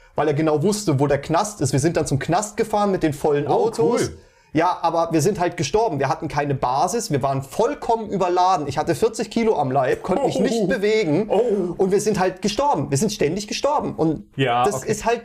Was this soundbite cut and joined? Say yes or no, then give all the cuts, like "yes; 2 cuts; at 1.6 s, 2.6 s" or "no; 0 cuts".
no; 0 cuts